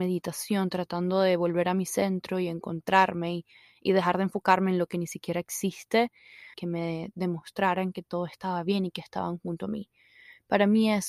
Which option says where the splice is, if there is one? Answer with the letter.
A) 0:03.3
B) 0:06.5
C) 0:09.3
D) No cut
B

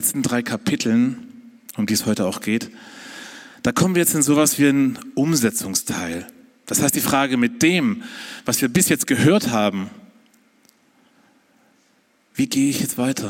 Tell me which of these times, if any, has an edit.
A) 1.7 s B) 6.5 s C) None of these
C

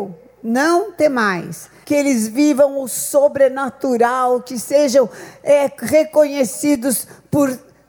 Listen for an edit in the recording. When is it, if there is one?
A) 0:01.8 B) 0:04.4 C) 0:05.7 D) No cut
A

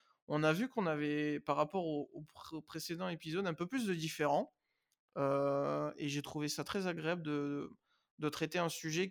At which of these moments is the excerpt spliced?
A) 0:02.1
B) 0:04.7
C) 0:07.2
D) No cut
D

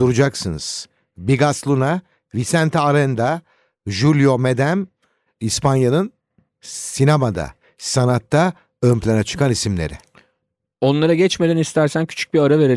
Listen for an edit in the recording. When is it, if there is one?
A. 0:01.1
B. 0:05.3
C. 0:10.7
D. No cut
D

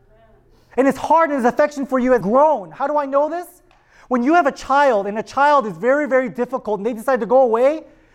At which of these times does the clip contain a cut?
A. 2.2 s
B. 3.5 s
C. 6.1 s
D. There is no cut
A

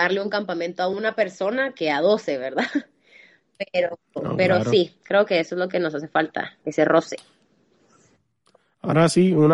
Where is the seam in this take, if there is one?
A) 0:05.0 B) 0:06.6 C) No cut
B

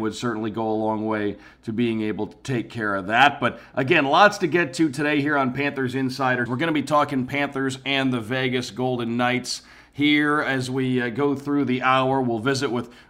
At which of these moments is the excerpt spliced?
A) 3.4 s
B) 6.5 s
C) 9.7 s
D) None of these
B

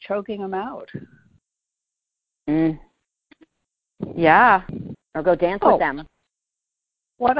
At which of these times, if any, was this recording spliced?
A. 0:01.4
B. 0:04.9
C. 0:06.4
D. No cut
B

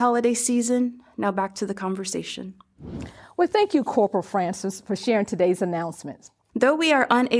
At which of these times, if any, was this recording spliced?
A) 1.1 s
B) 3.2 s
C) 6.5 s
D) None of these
C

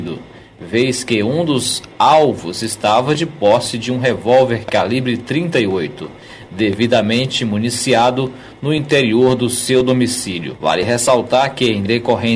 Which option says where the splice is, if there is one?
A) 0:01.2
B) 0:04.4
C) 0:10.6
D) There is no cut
D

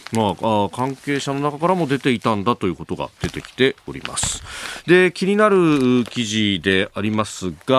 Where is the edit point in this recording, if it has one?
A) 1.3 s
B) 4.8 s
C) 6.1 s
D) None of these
D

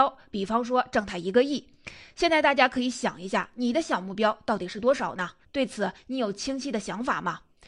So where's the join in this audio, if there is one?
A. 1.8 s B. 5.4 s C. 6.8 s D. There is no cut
B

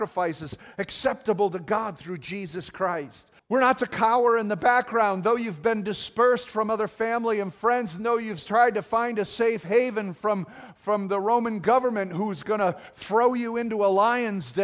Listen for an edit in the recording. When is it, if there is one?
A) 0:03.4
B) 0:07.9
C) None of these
A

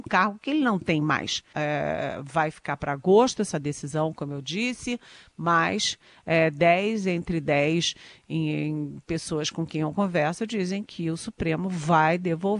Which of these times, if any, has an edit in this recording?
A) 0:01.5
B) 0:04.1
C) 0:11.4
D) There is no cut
A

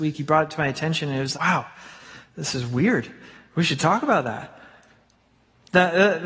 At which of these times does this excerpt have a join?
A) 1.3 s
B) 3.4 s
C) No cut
A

